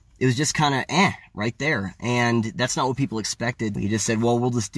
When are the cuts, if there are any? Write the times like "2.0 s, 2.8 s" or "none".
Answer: 3.8 s